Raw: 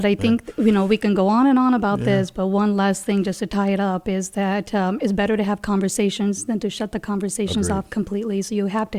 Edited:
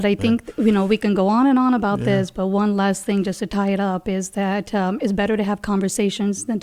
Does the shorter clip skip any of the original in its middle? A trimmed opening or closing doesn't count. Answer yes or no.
no